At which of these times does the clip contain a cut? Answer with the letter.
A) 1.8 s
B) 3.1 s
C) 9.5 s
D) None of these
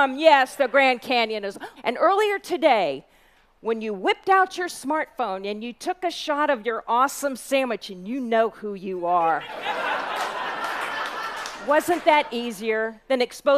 A